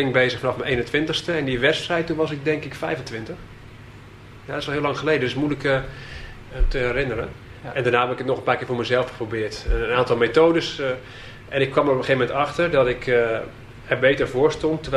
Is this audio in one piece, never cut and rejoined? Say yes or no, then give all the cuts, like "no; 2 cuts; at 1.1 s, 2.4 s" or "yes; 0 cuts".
yes; 0 cuts